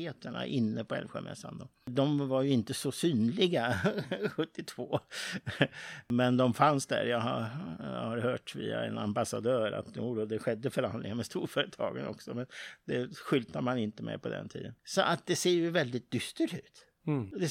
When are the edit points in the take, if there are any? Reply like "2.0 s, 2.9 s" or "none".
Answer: 14.8 s